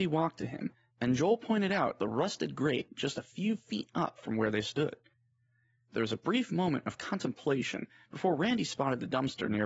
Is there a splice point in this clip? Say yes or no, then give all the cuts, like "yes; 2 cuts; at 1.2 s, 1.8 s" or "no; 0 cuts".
no; 0 cuts